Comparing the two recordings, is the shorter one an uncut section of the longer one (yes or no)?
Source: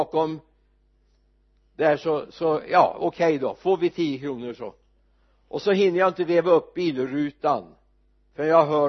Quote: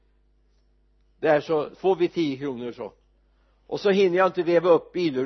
no